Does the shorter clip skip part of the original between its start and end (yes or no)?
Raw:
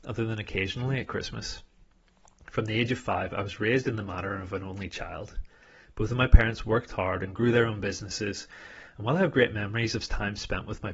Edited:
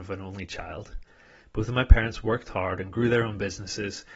no